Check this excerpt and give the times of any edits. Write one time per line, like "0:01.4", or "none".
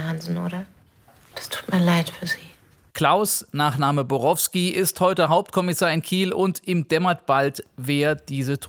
0:02.9

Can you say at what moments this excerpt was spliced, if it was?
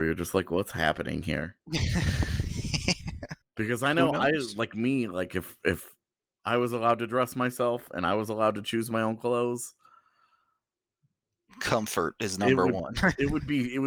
0:03.4

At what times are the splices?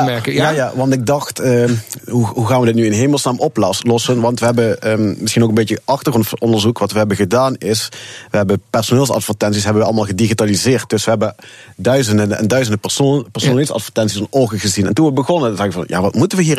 0:02.0

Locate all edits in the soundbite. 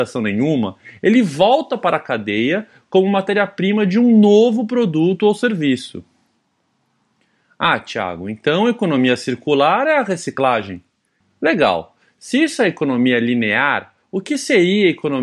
0:11.2

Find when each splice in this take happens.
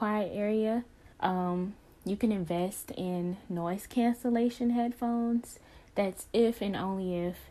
0:01.1

